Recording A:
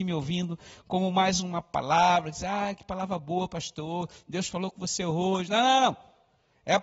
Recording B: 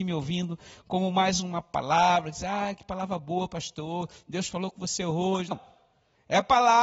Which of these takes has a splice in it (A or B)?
B